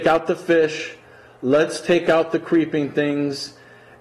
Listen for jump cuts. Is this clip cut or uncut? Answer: uncut